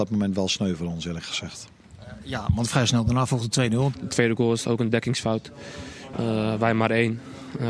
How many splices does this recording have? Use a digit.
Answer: 2